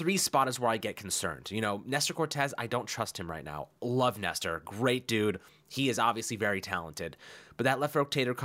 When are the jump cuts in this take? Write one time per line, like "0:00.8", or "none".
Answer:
none